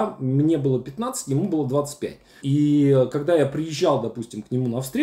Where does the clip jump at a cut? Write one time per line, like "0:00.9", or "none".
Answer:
0:02.4